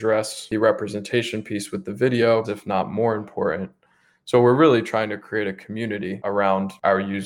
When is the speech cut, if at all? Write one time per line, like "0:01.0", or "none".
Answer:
0:02.4

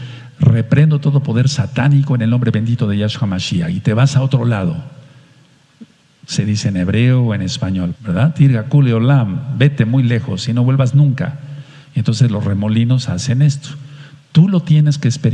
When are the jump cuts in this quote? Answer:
0:07.9

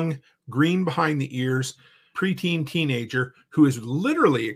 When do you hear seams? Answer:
0:02.1

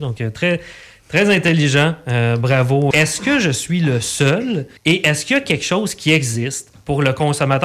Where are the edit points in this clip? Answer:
0:02.9
0:04.8

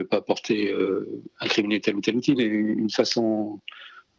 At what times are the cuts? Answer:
0:02.4

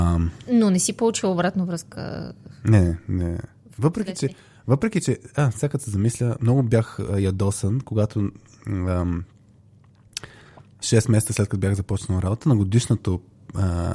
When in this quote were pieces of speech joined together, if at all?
none

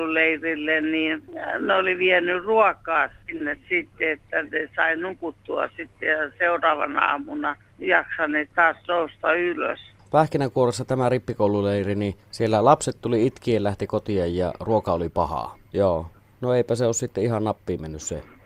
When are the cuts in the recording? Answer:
0:15.7

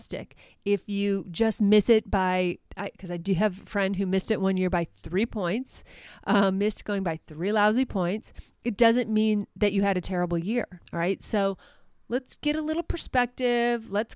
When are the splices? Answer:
0:10.9

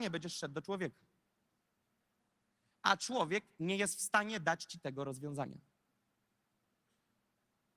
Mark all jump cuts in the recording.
none

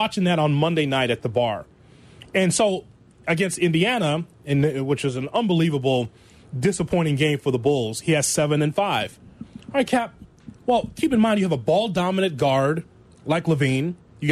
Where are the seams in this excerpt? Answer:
none

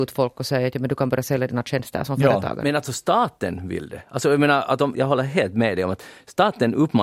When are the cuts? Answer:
0:04.9

